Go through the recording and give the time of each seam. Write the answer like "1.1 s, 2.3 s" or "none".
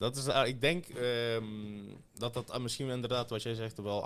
2.1 s